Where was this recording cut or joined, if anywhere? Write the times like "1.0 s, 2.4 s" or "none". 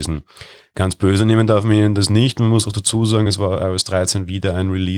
none